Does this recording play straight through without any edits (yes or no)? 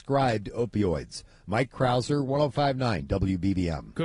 yes